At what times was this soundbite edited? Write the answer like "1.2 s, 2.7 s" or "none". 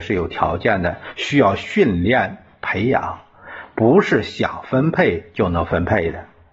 none